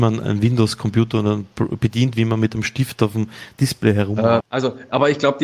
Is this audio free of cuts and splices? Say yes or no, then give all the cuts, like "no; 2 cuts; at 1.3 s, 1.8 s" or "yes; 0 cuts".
no; 1 cut; at 4.4 s